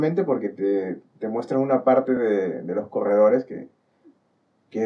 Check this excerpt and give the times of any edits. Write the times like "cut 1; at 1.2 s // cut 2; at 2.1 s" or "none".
none